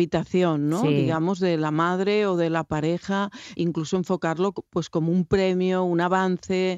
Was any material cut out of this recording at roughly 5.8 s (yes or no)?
no